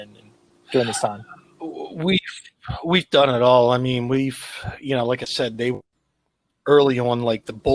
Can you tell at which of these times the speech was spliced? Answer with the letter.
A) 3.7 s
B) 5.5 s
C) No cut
C